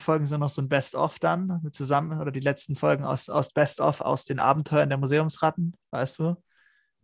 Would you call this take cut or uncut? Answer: uncut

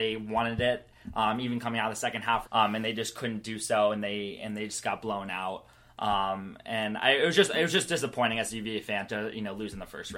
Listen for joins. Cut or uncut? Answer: cut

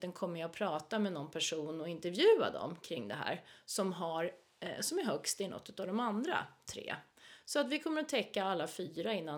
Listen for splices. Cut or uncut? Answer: uncut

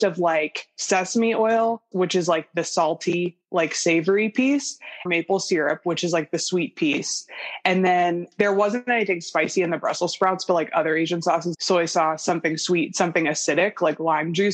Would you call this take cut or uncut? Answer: cut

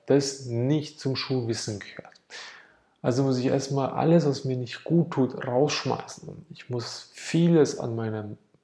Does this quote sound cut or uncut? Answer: uncut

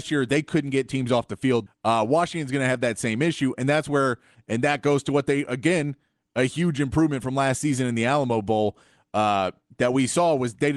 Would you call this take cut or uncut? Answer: cut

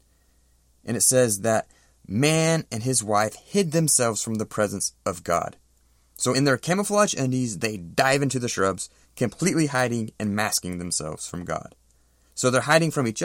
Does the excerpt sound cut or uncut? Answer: uncut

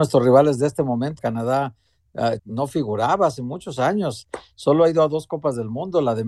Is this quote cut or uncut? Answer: cut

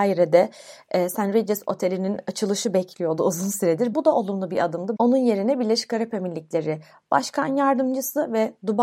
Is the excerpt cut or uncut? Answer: cut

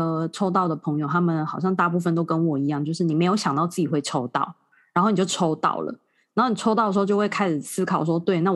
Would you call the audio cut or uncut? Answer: uncut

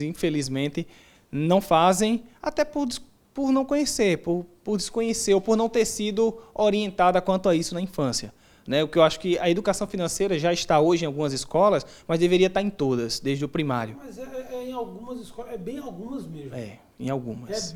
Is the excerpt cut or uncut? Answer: uncut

